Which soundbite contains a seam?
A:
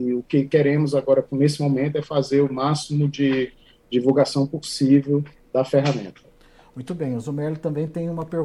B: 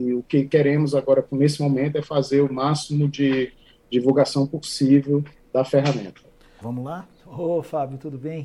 B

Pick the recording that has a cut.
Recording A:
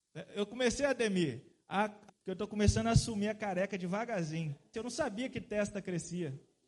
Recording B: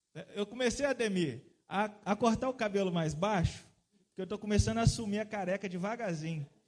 A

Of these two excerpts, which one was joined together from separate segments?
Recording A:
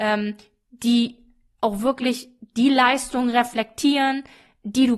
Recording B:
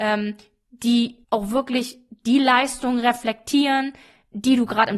B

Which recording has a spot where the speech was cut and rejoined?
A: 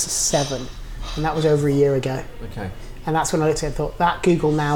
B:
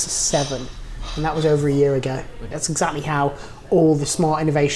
B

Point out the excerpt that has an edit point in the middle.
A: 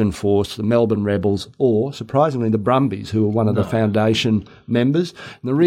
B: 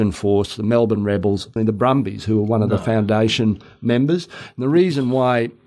B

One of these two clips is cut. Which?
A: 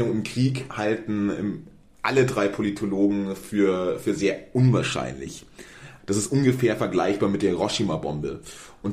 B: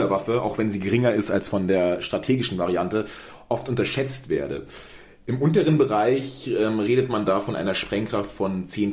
A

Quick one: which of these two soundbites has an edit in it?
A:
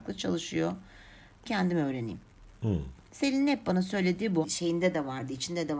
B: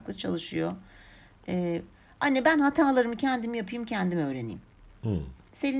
A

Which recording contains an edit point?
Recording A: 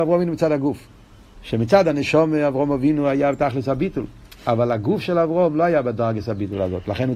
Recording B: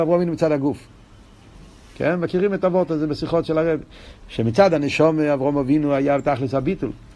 A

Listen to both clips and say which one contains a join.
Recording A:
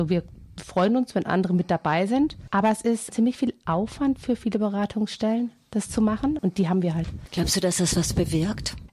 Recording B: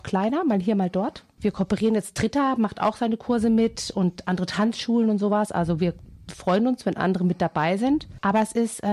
A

